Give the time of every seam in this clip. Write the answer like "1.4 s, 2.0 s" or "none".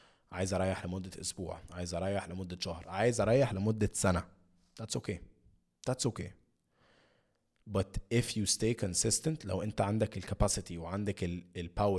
none